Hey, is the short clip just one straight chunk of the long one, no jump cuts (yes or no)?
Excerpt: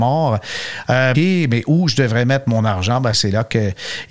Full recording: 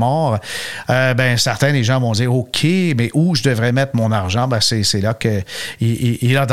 no